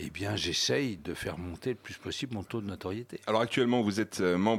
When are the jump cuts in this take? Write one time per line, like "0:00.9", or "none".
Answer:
0:01.0